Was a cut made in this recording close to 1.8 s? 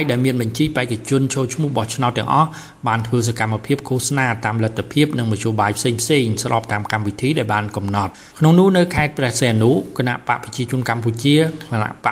no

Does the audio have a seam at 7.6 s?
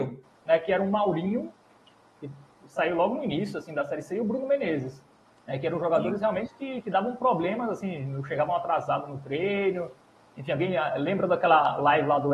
no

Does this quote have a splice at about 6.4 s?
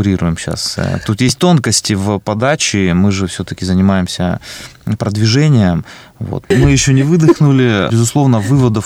yes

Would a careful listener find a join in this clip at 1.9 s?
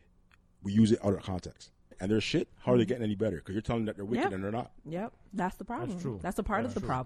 yes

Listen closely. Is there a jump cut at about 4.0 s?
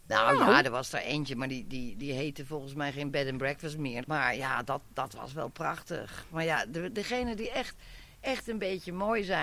yes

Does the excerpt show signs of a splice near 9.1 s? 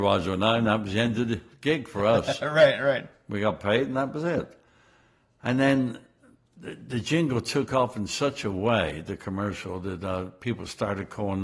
no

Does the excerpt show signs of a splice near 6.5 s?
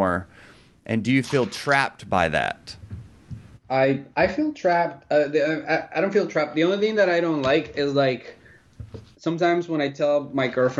no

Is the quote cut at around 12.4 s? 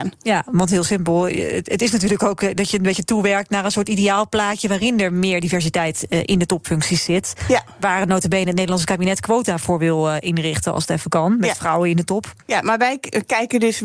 yes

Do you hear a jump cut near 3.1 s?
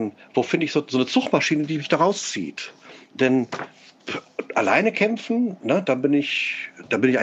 yes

